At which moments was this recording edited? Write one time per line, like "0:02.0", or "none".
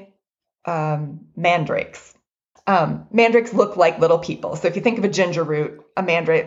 0:02.6